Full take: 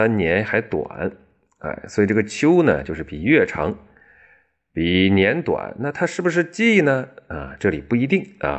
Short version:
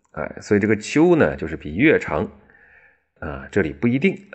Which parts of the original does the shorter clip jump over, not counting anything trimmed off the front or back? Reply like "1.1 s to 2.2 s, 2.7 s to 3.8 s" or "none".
4.6 s to 7.2 s